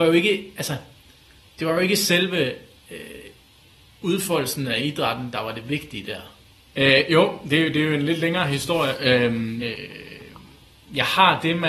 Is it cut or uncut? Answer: cut